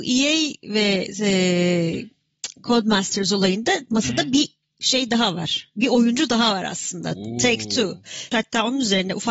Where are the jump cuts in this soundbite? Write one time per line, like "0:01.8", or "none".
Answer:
0:08.3